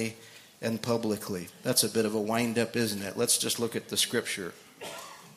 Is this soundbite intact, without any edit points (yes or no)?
yes